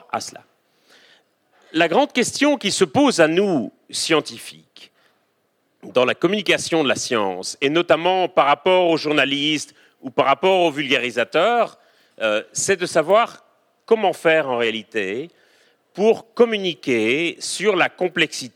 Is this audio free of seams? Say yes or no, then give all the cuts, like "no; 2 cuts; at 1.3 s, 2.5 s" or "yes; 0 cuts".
yes; 0 cuts